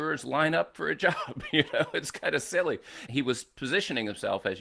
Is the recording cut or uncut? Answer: cut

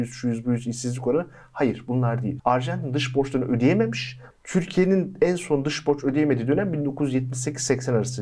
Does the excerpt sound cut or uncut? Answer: cut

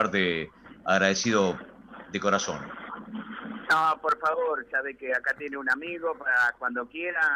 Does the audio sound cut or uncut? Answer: uncut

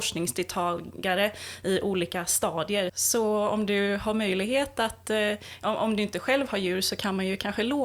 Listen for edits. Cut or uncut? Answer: cut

